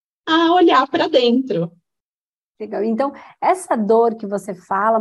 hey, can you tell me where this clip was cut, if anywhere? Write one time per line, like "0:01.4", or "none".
none